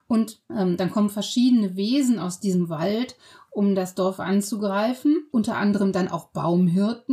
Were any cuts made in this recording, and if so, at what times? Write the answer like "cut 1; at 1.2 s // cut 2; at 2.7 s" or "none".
none